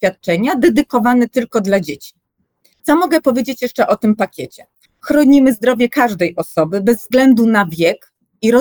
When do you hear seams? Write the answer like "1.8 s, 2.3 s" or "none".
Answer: 2.7 s, 4.9 s